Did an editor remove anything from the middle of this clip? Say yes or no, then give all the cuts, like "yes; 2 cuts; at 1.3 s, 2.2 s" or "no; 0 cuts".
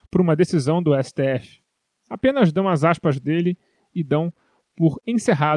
yes; 1 cut; at 1.9 s